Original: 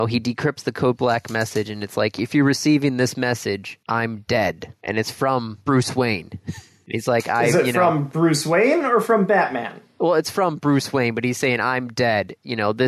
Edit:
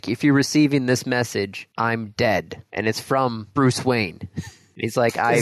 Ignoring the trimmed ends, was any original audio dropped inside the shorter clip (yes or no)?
no